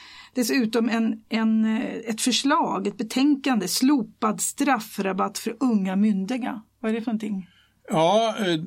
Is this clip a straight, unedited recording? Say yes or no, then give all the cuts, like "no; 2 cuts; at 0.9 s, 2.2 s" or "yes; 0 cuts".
yes; 0 cuts